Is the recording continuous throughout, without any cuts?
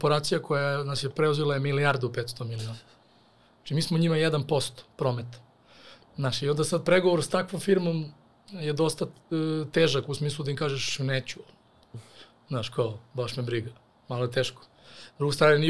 yes; 0 cuts

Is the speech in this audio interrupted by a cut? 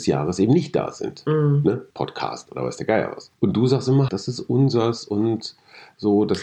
yes; 2 cuts; at 1.9 s, 4.1 s

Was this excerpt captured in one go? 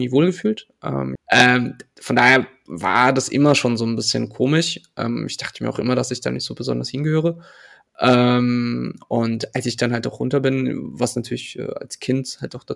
no; 1 cut; at 1.2 s

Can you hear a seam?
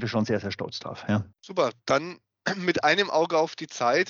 yes; 1 cut; at 1.3 s

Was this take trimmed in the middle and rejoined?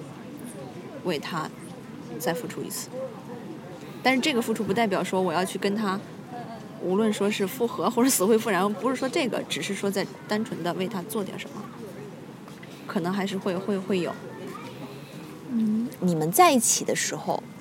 yes; 2 cuts; at 13.4 s, 16.0 s

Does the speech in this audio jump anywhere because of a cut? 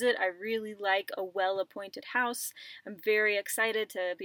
no; 0 cuts

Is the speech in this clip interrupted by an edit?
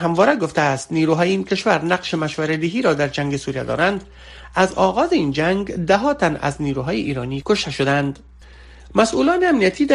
no; 0 cuts

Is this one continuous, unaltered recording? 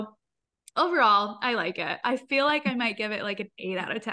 yes; 0 cuts

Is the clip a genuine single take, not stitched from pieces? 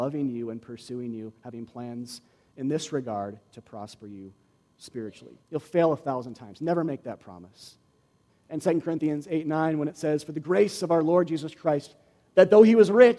no; 2 cuts; at 5.4 s, 8.3 s

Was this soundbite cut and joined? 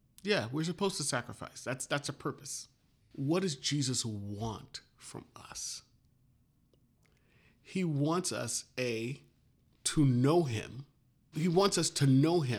yes; 2 cuts; at 3.0 s, 11.3 s

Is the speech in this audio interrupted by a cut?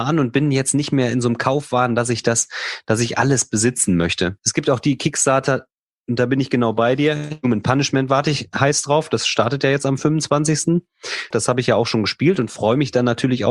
yes; 2 cuts; at 4.4 s, 11.3 s

